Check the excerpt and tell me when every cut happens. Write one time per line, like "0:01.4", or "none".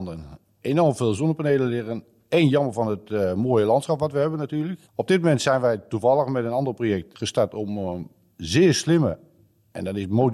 0:04.8
0:07.1